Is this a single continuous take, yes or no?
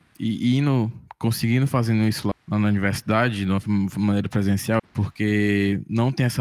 no